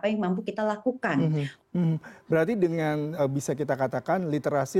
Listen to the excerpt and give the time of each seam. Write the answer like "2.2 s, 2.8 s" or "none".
1.6 s, 3.2 s